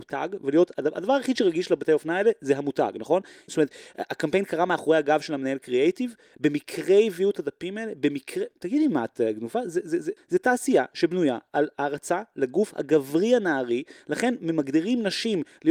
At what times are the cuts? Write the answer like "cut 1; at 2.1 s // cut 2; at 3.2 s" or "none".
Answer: cut 1; at 3.5 s // cut 2; at 10.2 s